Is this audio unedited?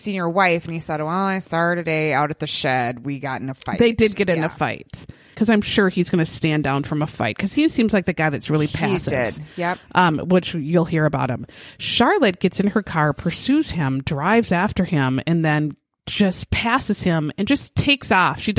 no; 1 cut; at 5.3 s

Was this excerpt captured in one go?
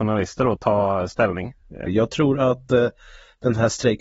no; 1 cut; at 1.9 s

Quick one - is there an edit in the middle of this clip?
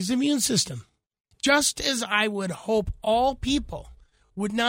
yes; 1 cut; at 1.3 s

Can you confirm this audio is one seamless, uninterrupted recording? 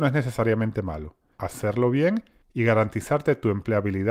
no; 1 cut; at 1.4 s

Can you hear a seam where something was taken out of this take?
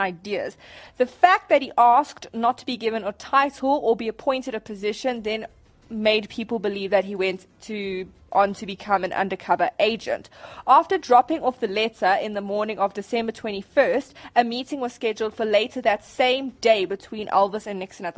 no; 0 cuts

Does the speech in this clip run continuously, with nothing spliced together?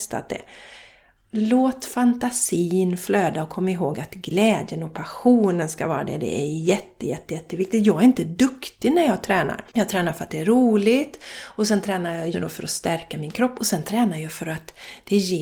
no; 3 cuts; at 7.0 s, 9.7 s, 12.3 s

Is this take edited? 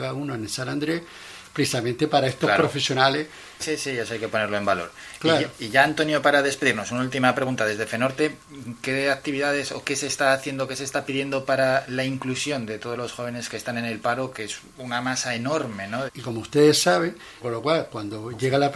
yes; 3 cuts; at 3.6 s, 16.1 s, 17.4 s

